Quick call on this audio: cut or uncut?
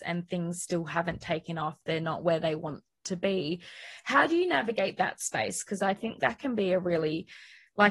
uncut